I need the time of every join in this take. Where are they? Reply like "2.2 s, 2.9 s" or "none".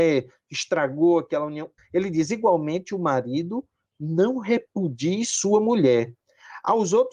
1.8 s

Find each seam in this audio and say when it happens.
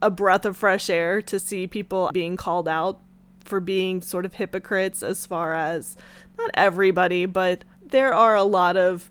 2.1 s, 7.7 s

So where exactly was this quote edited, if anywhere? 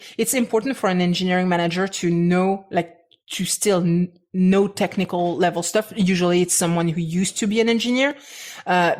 none

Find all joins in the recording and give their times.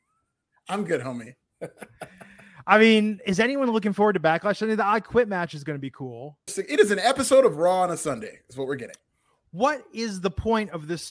6.5 s

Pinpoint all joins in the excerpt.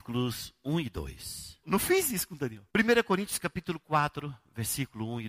1.6 s, 2.7 s

